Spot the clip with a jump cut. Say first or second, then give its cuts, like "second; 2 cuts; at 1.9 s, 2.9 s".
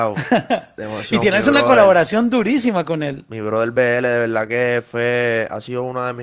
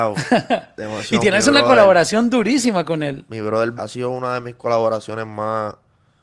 second; 1 cut; at 3.8 s